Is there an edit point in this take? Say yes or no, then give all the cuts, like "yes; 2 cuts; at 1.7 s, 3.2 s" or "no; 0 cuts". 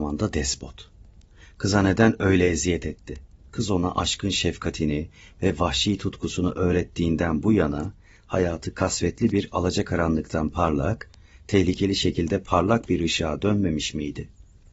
yes; 1 cut; at 3.4 s